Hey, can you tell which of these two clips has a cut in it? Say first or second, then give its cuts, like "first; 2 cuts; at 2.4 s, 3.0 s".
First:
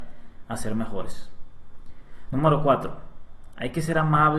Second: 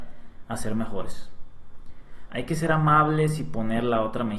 second; 1 cut; at 2.3 s